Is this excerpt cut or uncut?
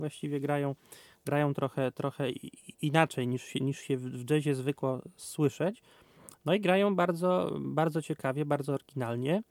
uncut